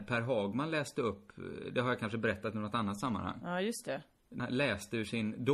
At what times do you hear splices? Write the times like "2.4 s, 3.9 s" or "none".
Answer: 4.4 s